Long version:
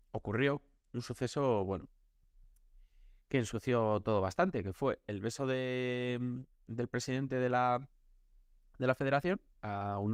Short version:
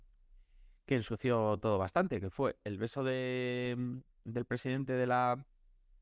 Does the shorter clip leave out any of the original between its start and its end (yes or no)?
no